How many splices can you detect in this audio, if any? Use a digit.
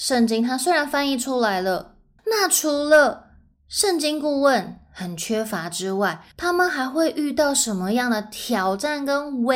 2